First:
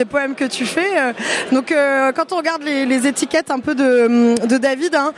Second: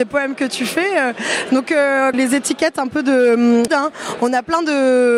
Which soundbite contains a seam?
second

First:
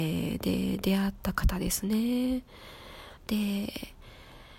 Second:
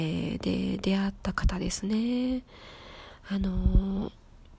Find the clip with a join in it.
first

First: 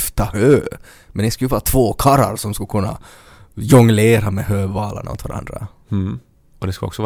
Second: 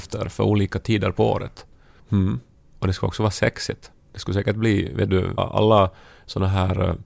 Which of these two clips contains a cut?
second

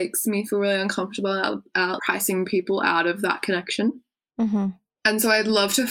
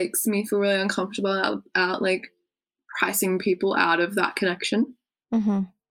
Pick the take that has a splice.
first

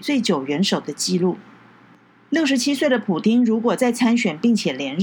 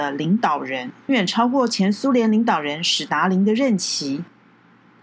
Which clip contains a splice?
second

